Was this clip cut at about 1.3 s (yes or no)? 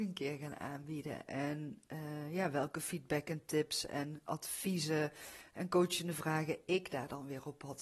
yes